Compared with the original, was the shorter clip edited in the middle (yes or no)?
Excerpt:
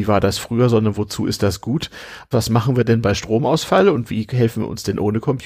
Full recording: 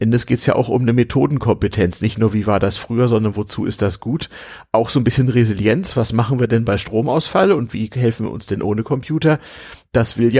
yes